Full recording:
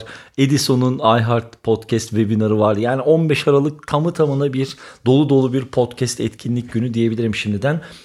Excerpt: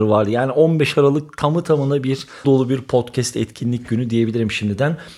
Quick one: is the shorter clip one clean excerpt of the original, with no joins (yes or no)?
no